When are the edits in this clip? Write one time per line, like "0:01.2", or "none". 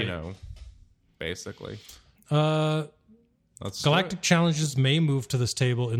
0:02.2